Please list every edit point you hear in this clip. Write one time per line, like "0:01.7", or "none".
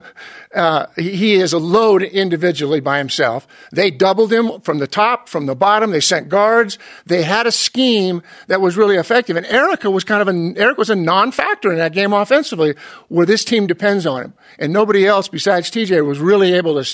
none